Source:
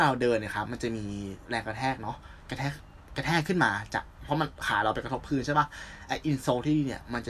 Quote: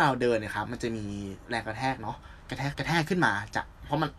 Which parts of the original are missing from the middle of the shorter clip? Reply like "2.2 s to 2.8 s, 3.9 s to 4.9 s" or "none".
2.7 s to 3.1 s